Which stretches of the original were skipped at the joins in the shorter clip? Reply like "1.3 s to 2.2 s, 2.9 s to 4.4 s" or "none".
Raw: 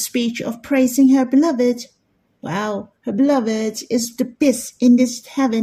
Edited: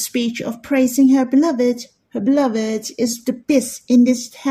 2.1 s to 3.0 s